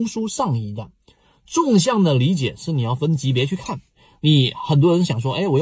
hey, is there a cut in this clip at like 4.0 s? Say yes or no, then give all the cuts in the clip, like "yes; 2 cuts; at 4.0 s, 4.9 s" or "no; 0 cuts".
no; 0 cuts